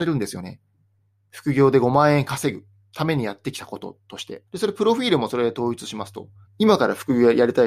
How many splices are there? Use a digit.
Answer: 2